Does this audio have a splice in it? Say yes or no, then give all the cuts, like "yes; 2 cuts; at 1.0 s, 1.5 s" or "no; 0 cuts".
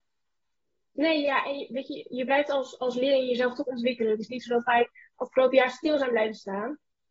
no; 0 cuts